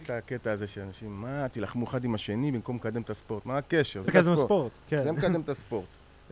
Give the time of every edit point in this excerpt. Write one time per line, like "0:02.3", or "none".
0:04.1